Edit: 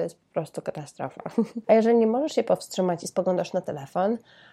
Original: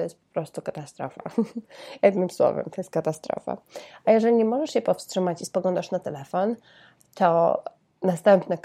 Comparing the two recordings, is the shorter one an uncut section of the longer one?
no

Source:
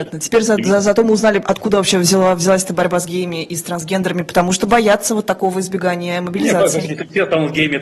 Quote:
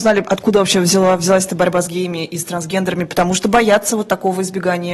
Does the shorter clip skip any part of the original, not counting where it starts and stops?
no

